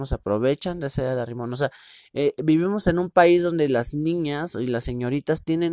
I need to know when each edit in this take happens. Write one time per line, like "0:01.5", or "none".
none